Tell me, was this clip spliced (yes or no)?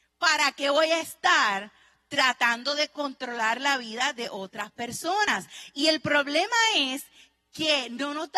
no